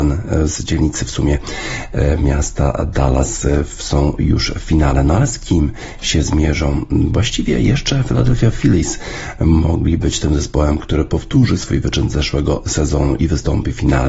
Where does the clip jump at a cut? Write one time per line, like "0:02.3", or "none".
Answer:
none

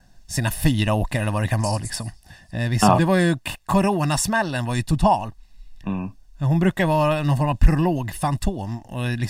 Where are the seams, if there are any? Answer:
0:03.0

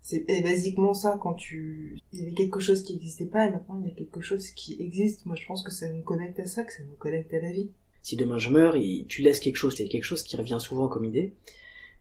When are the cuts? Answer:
0:02.0
0:07.9
0:09.8

